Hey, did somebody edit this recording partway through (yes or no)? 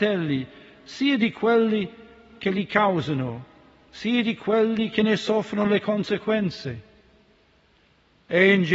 no